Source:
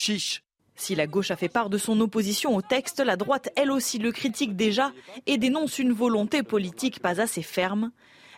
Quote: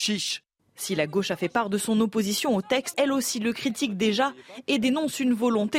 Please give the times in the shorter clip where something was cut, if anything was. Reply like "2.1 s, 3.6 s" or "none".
2.9 s

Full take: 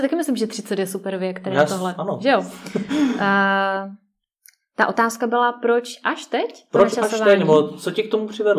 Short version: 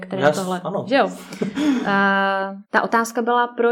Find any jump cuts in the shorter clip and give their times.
2.6 s

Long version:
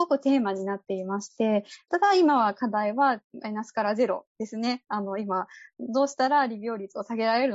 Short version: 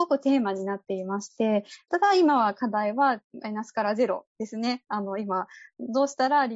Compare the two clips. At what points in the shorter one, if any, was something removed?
none

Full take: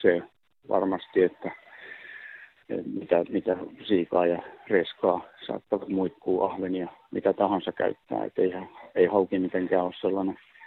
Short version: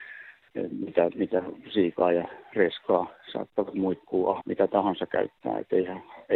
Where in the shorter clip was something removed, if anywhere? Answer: 4.4 s

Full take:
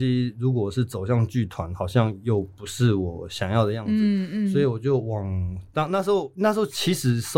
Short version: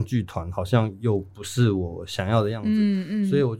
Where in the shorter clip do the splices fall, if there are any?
none

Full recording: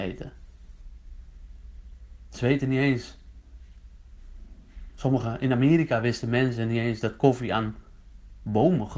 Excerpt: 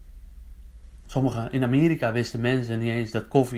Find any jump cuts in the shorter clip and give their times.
1.0 s

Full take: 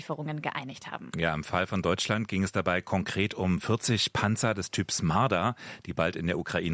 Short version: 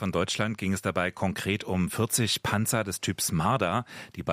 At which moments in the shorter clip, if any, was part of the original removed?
none

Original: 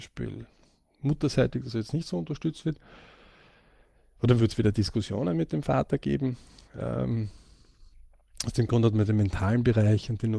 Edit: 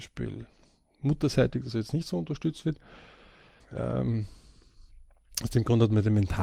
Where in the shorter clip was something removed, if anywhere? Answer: 3.6 s

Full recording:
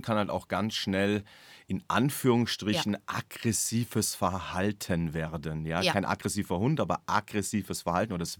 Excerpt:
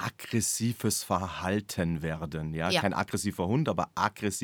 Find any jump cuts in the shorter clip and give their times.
none

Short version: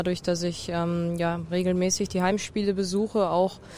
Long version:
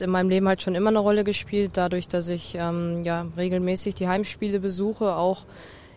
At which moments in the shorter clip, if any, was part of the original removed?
none

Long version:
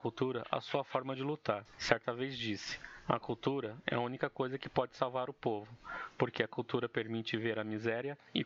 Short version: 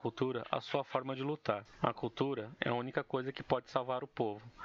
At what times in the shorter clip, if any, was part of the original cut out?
1.8 s

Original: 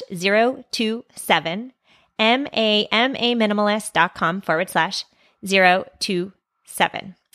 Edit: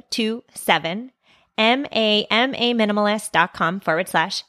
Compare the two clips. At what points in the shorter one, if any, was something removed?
none

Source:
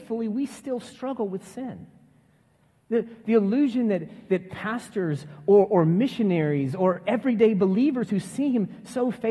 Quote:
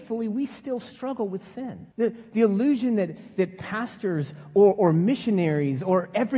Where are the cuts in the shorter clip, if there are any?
1.9 s

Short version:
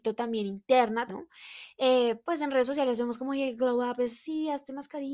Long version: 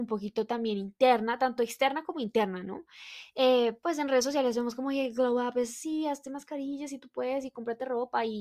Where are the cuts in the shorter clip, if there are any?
1.1 s

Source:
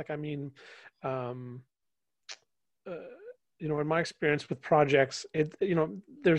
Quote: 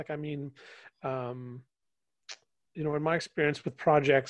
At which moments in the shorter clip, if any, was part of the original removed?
2.7 s

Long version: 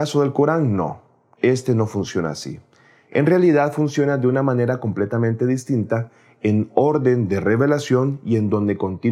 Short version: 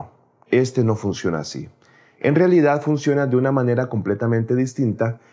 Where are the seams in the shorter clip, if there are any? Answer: none

